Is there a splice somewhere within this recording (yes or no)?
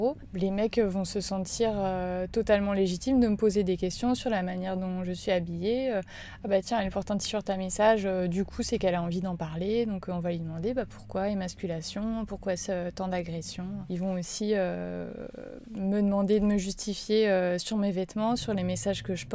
no